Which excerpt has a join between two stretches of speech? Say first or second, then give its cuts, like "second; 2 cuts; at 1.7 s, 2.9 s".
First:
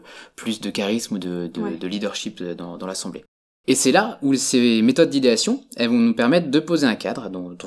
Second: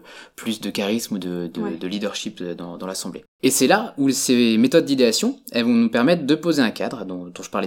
second; 1 cut; at 3.3 s